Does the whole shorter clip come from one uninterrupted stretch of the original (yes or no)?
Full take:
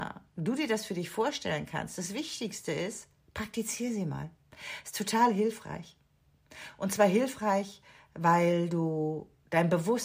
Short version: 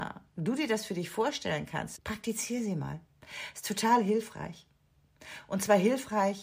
no